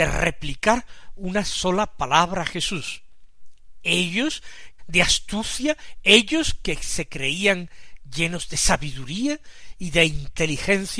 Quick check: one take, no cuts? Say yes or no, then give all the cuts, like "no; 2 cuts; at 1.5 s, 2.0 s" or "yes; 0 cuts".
no; 1 cut; at 4.8 s